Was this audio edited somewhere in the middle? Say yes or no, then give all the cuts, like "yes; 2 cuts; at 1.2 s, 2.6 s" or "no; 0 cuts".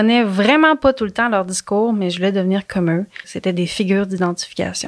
yes; 1 cut; at 3.2 s